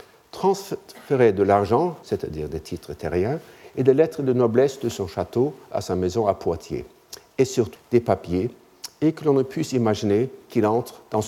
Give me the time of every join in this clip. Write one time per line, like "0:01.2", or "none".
0:02.0
0:07.7